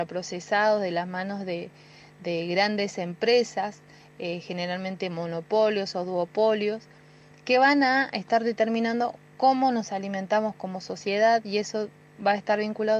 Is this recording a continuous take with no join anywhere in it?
yes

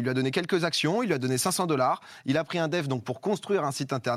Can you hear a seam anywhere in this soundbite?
no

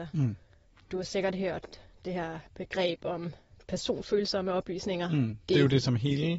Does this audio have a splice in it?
yes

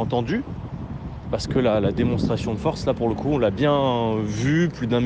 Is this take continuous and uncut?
yes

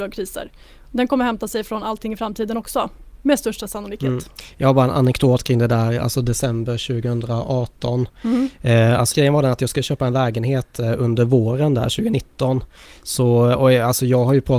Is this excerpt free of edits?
no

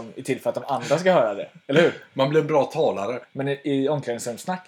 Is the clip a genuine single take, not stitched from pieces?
no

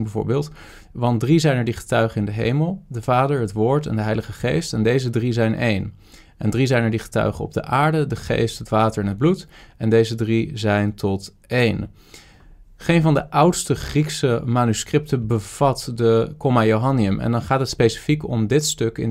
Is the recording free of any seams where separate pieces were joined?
yes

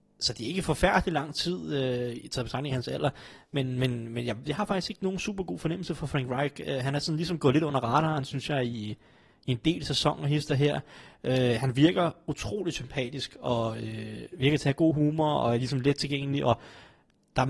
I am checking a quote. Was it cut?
yes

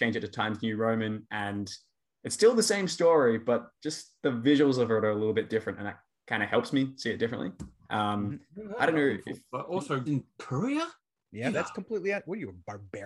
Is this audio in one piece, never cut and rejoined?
no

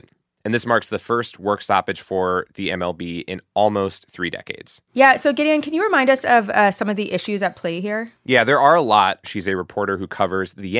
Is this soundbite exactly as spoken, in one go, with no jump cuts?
no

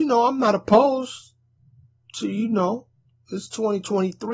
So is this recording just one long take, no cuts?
yes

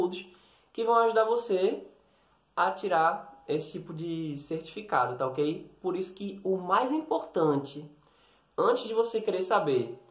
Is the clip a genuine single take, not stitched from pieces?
yes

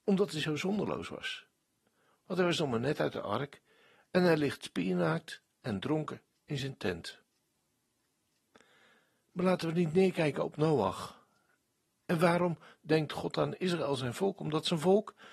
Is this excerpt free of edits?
yes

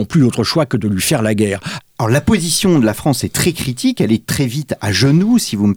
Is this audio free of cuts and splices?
no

